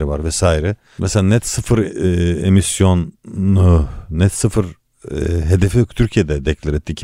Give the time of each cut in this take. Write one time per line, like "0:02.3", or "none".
0:01.0